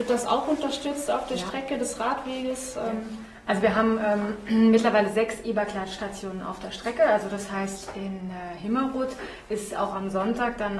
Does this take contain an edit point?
no; 0 cuts

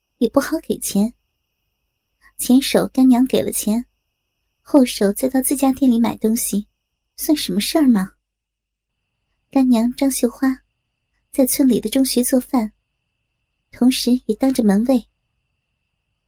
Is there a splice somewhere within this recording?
no; 0 cuts

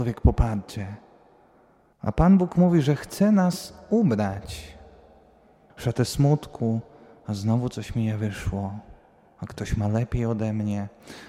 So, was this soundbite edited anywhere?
yes; 2 cuts; at 1.9 s, 5.7 s

